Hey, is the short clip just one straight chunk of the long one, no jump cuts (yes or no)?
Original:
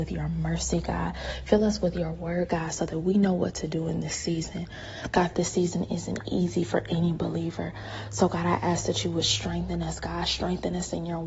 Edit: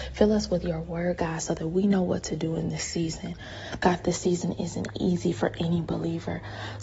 yes